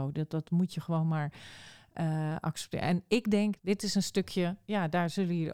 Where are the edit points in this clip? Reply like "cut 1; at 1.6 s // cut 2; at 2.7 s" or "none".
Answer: cut 1; at 3.6 s